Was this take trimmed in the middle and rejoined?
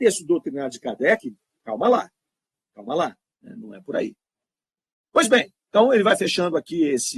yes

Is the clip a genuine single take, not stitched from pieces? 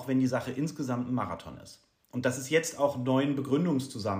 no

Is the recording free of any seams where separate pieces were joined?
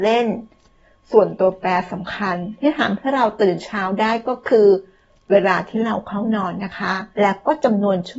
no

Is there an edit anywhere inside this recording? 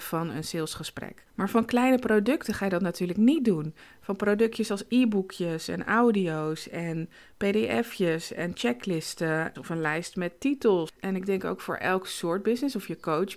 yes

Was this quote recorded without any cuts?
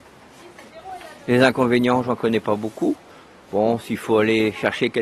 yes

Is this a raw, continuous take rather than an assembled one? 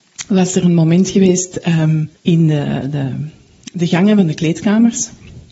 no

